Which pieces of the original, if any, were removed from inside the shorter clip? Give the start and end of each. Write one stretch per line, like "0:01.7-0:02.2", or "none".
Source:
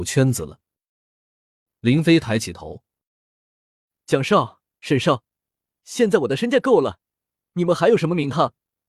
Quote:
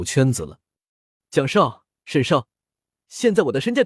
0:01.2-0:04.0